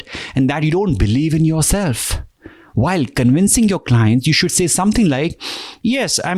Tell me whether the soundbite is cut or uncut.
uncut